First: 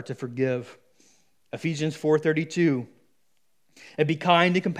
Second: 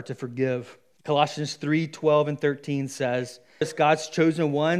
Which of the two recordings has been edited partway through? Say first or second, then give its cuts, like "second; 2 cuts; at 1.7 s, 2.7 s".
second; 2 cuts; at 1.0 s, 3.6 s